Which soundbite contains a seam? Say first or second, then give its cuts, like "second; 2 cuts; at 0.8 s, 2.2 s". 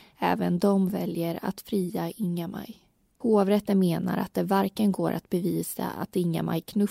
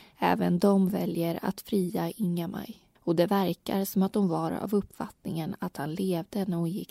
second; 1 cut; at 3.0 s